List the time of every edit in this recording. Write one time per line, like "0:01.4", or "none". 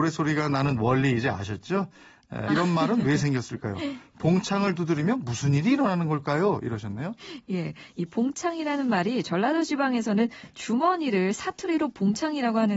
0:02.5